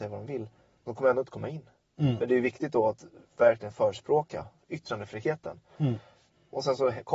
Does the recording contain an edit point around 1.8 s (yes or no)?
no